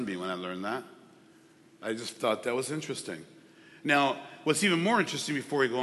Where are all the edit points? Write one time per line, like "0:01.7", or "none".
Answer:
none